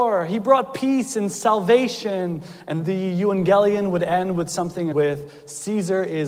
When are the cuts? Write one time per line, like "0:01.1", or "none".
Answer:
0:02.8
0:04.9